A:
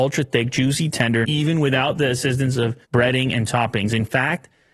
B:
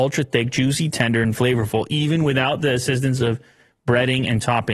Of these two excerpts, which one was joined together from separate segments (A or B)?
A